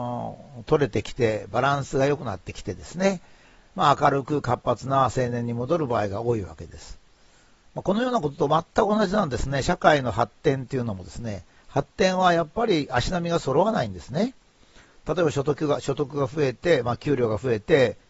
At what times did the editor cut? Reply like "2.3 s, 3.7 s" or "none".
none